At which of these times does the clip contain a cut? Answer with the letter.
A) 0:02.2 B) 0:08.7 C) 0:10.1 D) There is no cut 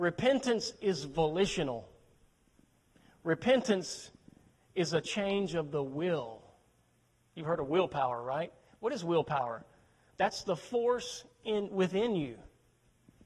D